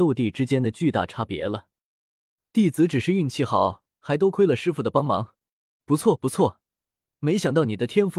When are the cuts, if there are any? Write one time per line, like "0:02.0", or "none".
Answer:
0:05.8